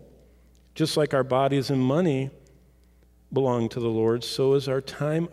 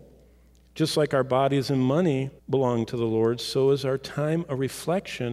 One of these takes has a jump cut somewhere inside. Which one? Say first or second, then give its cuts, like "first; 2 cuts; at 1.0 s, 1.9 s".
second; 1 cut; at 2.4 s